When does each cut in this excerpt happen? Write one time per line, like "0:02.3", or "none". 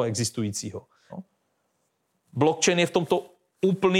0:01.1